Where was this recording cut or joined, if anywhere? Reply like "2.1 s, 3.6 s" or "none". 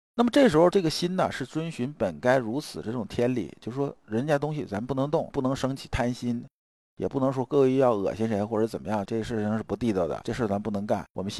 9.1 s

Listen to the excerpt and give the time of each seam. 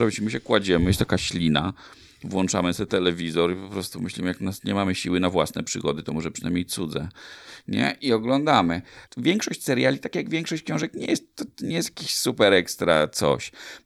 9.1 s

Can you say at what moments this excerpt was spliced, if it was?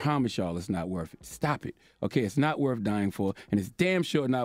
none

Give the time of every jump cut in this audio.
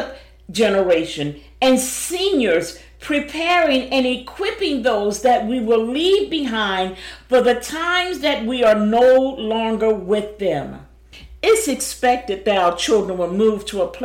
none

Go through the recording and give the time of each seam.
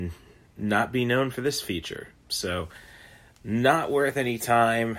none

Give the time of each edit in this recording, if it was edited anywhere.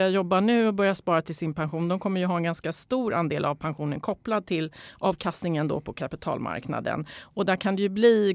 none

